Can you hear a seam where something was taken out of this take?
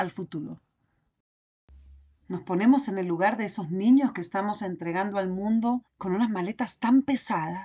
yes; 1 cut; at 5.9 s

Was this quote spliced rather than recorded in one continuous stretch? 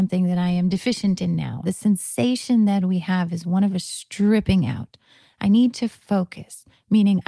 yes; 1 cut; at 1.6 s

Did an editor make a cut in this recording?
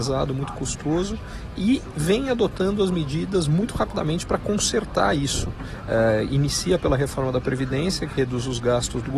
no; 0 cuts

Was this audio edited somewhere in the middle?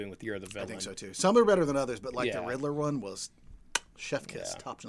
no; 0 cuts

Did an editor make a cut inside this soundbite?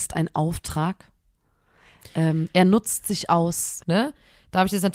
yes; 1 cut; at 3.8 s

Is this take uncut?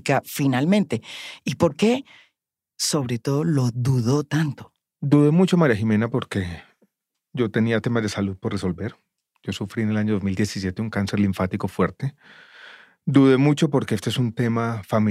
yes; 0 cuts

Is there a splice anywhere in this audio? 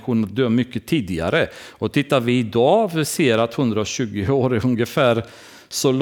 no; 0 cuts

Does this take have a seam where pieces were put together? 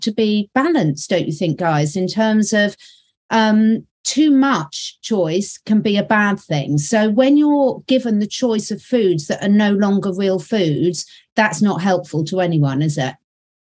no; 0 cuts

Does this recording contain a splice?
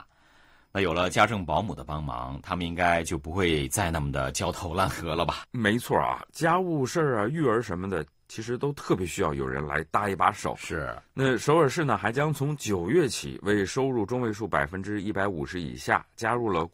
no; 0 cuts

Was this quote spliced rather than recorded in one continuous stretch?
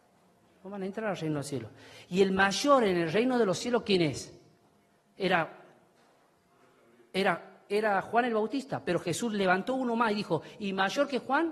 no; 0 cuts

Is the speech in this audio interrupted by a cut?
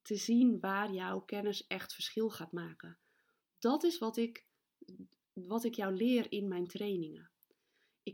no; 0 cuts

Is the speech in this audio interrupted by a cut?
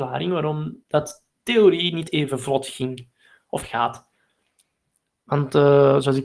no; 0 cuts

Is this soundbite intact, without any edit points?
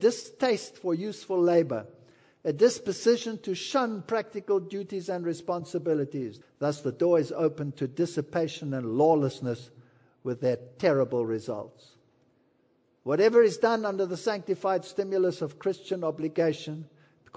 no; 1 cut; at 6.4 s

